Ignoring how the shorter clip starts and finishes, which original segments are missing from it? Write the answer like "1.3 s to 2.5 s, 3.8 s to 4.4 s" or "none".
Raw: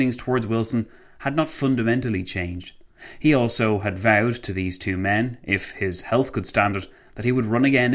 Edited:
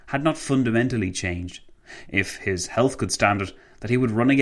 3.2 s to 5.4 s